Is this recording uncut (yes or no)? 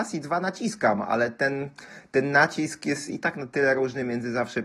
yes